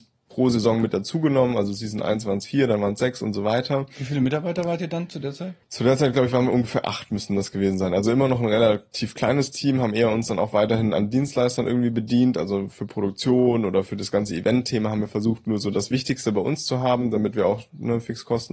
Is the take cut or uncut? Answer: cut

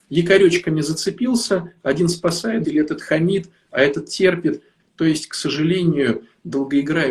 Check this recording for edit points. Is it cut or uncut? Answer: cut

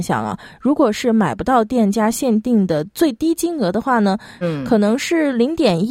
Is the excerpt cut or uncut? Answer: cut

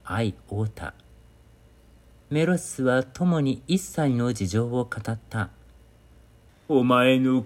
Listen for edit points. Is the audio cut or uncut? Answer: cut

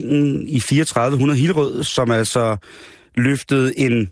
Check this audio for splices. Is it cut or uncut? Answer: uncut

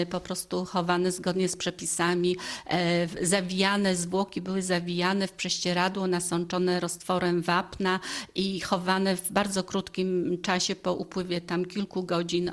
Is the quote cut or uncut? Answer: uncut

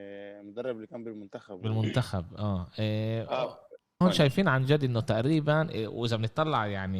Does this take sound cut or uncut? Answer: cut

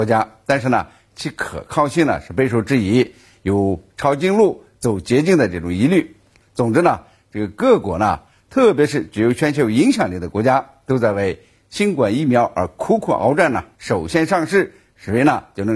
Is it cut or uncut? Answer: cut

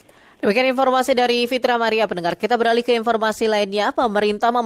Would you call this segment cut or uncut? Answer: uncut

